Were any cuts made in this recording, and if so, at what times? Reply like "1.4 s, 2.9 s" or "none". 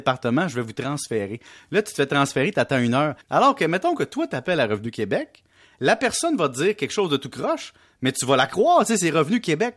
3.2 s